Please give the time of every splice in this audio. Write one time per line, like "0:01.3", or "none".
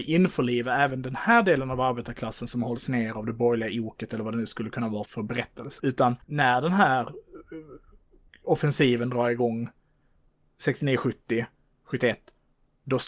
0:05.1